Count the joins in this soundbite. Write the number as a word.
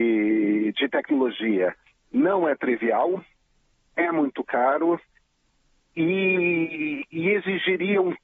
zero